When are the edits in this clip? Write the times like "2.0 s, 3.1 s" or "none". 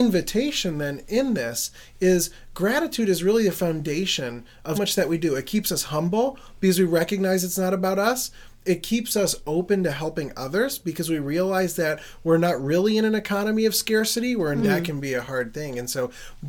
4.7 s, 14.6 s

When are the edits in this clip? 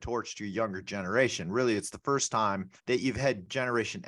2.8 s

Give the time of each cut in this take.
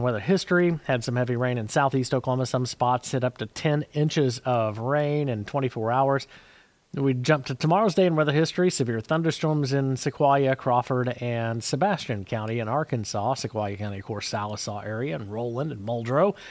6.9 s

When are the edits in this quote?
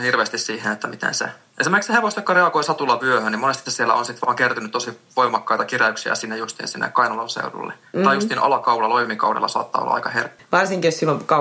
10.4 s

